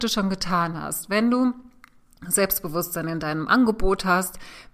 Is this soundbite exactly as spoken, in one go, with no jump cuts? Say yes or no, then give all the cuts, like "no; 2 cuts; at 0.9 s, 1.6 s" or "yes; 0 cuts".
yes; 0 cuts